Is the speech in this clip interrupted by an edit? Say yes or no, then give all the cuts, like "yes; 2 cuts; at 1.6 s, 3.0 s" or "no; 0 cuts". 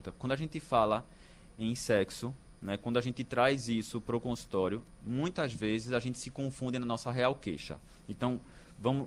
no; 0 cuts